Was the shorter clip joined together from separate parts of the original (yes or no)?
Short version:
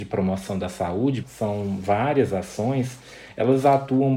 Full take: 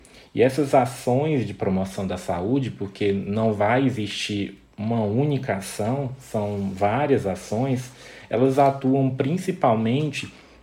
yes